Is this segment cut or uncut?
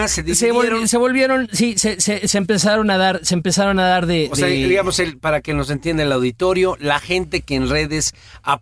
uncut